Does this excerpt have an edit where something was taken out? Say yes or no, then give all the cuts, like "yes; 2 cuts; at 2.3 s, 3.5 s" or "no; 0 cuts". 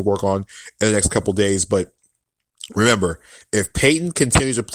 no; 0 cuts